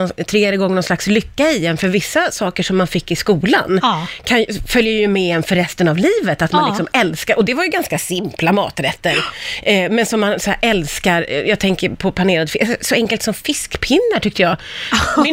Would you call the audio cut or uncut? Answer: uncut